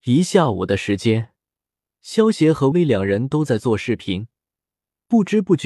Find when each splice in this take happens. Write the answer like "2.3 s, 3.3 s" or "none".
2.7 s